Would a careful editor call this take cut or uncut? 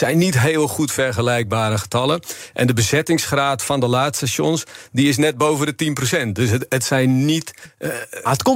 uncut